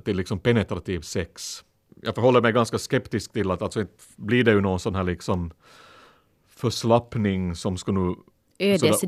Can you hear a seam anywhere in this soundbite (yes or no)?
no